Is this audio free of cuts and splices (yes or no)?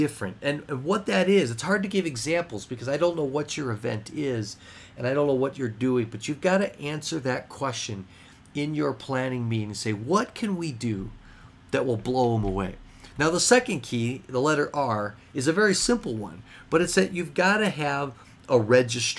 yes